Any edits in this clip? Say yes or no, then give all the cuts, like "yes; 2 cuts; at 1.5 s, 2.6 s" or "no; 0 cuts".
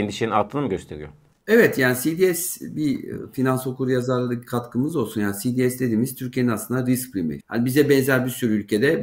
yes; 1 cut; at 7.4 s